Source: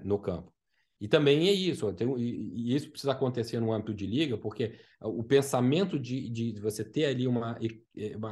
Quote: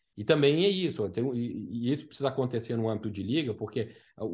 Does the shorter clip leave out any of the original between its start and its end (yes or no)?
no